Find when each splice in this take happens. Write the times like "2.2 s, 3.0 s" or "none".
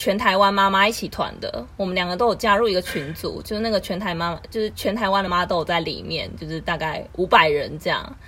5.3 s